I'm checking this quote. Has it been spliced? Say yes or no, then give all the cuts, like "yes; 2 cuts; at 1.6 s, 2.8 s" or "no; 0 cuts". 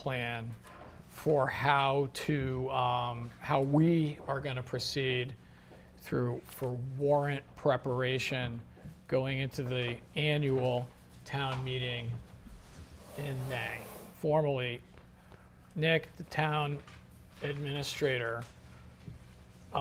yes; 1 cut; at 14.1 s